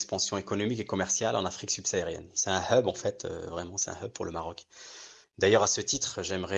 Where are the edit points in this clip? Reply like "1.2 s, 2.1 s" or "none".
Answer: 5.2 s